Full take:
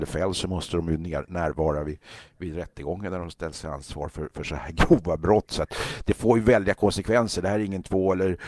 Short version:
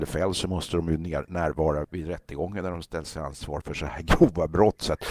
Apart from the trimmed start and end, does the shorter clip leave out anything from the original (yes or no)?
yes